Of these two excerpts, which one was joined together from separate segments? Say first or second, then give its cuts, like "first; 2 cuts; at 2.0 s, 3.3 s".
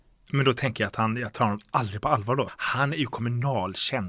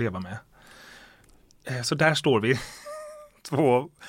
first; 1 cut; at 2.5 s